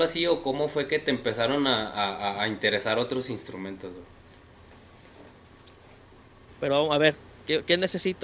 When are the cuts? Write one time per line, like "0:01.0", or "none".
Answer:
0:06.5